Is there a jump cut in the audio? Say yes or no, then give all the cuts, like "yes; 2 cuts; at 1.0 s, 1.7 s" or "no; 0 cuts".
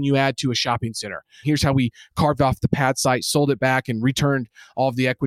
yes; 1 cut; at 1.4 s